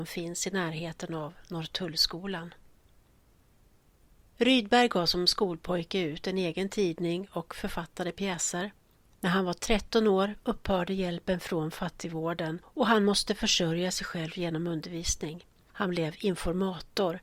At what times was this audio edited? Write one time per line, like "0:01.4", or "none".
none